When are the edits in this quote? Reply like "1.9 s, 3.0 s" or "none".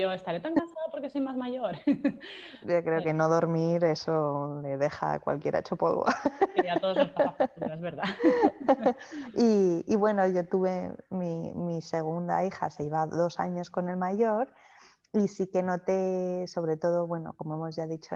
none